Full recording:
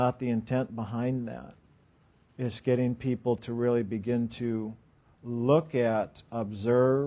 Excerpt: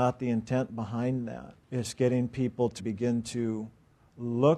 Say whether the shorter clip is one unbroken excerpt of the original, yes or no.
no